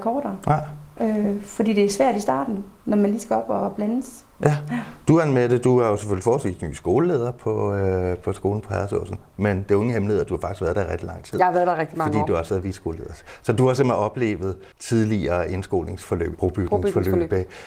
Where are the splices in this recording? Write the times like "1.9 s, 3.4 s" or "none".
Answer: 14.7 s, 16.3 s